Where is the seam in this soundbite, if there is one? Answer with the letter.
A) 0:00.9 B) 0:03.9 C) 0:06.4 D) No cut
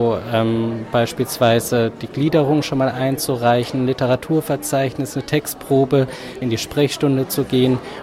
C